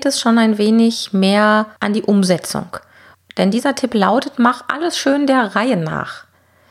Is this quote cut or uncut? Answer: uncut